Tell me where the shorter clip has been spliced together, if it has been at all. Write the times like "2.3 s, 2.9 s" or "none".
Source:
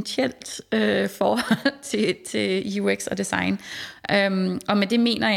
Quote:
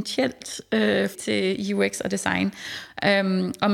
1.1 s